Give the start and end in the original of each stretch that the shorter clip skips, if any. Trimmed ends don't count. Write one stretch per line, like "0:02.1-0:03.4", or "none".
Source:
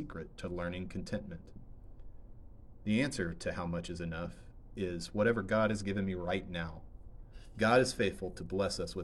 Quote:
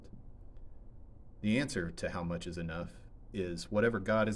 none